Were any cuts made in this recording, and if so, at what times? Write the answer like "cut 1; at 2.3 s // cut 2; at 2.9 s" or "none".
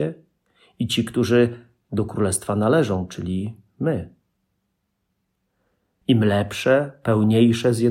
cut 1; at 6.0 s